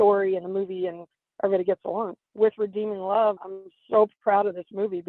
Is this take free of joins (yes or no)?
no